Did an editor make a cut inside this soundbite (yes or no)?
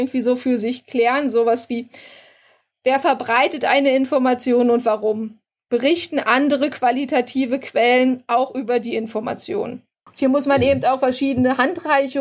yes